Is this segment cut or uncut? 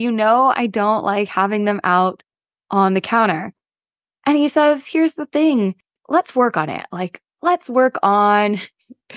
uncut